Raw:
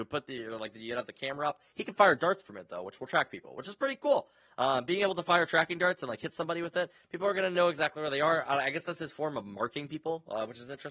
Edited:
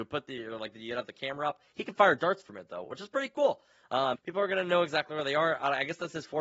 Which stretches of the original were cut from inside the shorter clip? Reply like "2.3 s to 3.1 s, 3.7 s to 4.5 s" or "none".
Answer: 2.8 s to 3.5 s, 4.8 s to 7.0 s